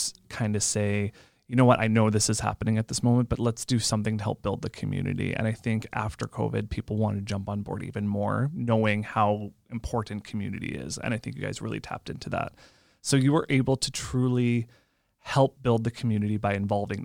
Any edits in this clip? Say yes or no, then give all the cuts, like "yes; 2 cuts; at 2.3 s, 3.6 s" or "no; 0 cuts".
no; 0 cuts